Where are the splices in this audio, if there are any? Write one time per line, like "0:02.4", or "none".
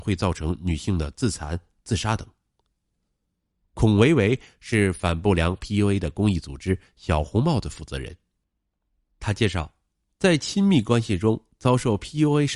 none

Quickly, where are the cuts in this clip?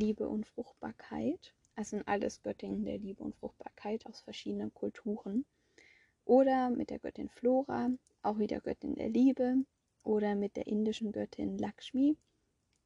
0:04.0
0:08.0

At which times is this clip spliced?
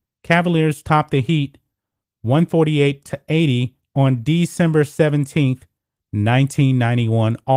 none

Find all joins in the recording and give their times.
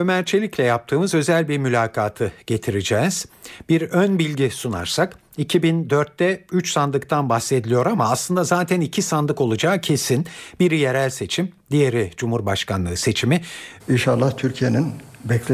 0:13.8

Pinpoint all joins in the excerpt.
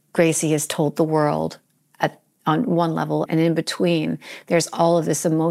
0:03.3

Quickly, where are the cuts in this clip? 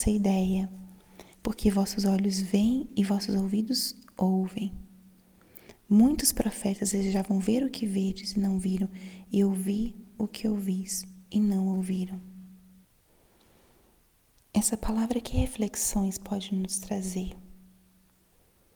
0:01.3

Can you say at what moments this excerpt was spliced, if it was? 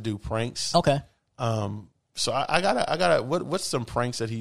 none

